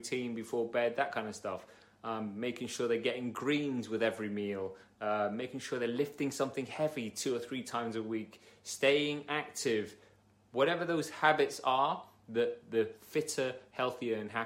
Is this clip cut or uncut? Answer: uncut